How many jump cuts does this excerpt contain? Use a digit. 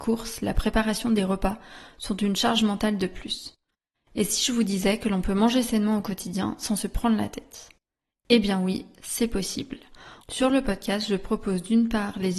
1